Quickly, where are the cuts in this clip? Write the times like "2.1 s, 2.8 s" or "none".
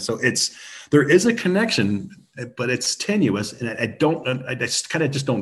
none